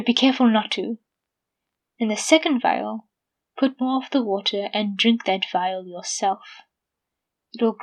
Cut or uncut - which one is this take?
uncut